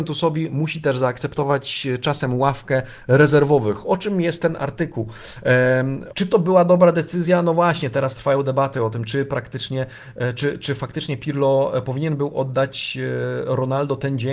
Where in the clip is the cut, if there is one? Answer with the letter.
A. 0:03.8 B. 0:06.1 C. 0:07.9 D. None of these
B